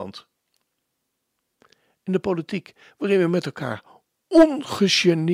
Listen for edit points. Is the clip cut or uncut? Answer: uncut